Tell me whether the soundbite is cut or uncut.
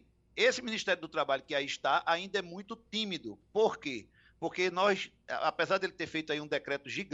uncut